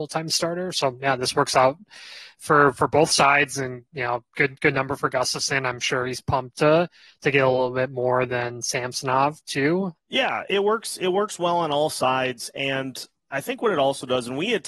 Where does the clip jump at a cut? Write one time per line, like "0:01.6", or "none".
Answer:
0:09.9